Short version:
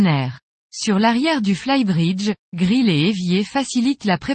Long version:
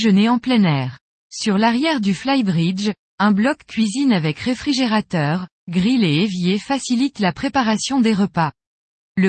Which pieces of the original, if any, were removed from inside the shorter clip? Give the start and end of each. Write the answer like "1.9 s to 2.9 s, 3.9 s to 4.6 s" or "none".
3.0 s to 5.6 s